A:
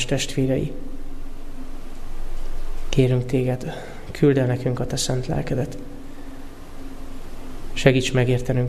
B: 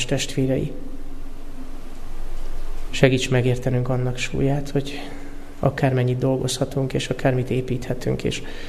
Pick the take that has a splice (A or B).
B